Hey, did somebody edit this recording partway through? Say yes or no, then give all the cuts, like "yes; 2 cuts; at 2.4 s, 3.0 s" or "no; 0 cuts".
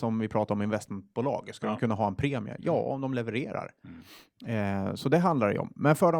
no; 0 cuts